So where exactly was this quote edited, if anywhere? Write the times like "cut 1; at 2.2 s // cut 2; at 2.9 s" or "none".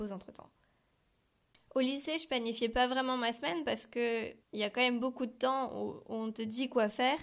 cut 1; at 1.5 s // cut 2; at 4.4 s